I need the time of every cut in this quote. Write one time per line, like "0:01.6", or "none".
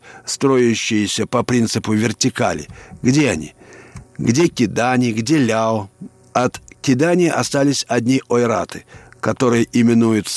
0:04.0
0:06.2